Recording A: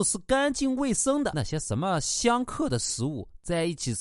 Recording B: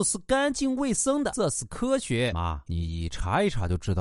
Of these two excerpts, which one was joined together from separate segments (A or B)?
B